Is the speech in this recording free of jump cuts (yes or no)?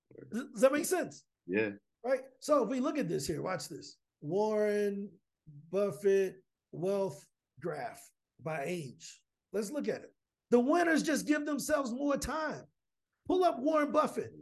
no